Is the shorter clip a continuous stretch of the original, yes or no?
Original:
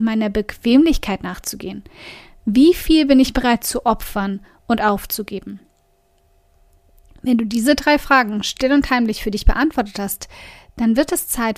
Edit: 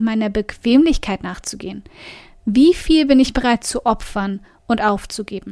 yes